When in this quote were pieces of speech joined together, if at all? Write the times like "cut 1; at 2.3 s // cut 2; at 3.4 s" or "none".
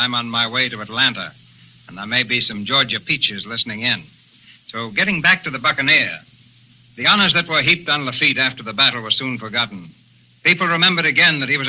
none